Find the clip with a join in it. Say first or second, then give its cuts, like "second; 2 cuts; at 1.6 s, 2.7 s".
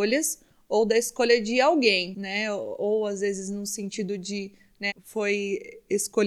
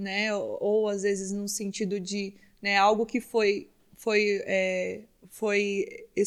first; 1 cut; at 4.9 s